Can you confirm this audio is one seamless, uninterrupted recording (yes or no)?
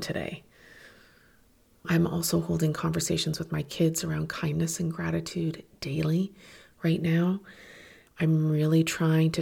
yes